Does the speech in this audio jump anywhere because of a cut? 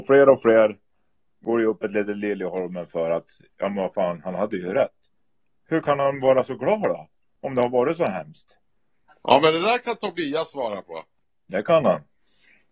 no; 0 cuts

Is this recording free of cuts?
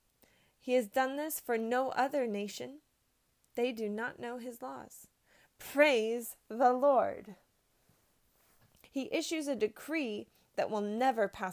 no; 1 cut; at 8.8 s

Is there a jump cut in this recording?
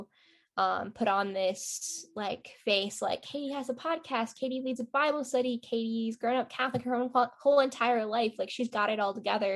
no; 0 cuts

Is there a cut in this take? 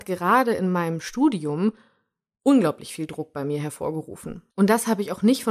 yes; 1 cut; at 4.5 s

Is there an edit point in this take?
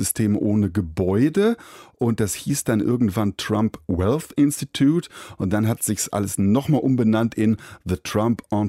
no; 0 cuts

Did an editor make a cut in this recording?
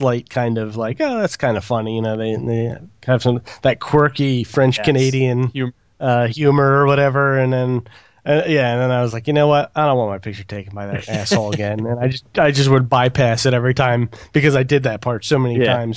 no; 0 cuts

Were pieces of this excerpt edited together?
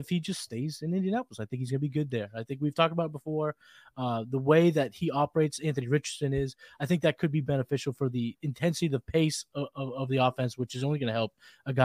no; 0 cuts

